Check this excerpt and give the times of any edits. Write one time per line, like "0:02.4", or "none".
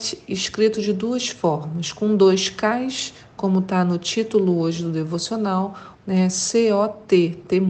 0:05.9